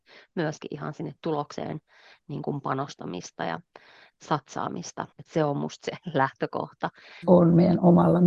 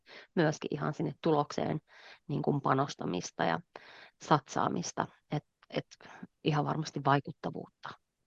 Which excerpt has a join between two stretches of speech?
first; 2 cuts; at 5.1 s, 7.2 s

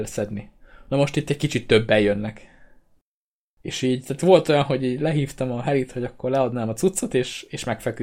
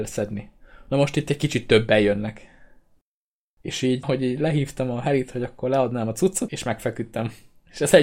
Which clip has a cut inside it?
second; 2 cuts; at 4.0 s, 6.5 s

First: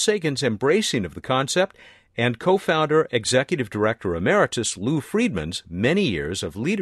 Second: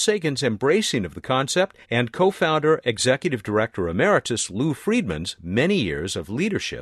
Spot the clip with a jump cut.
second; 1 cut; at 1.8 s

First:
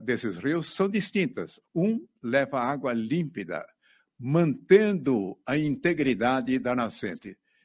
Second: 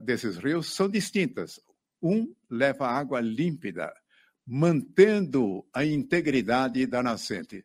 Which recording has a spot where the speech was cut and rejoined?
first; 1 cut; at 1.6 s

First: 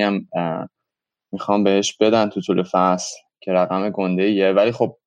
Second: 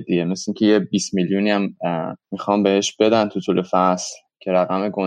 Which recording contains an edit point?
second; 1 cut; at 2.2 s

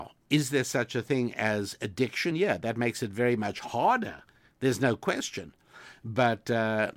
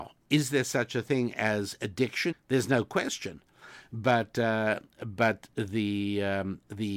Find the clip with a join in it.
second; 1 cut; at 2.3 s

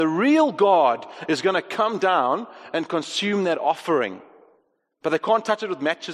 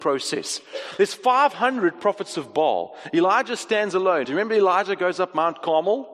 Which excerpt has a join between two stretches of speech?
second; 1 cut; at 4.2 s

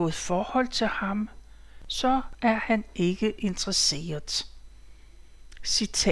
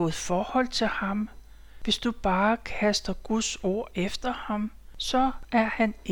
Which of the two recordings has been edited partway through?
first; 1 cut; at 1.8 s

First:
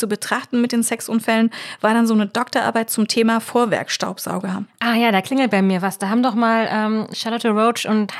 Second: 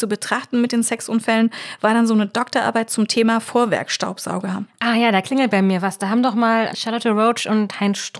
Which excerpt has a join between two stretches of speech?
second; 1 cut; at 6.7 s

